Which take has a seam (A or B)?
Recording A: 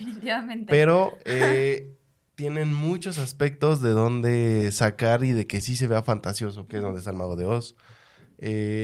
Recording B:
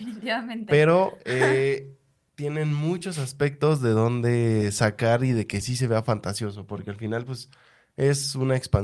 A